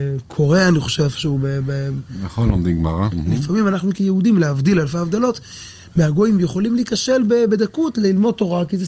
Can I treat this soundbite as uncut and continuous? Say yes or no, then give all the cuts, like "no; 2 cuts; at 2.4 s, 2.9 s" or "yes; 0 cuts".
no; 1 cut; at 3.1 s